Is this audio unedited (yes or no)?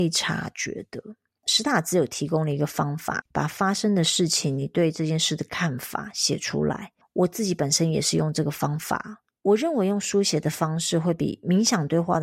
no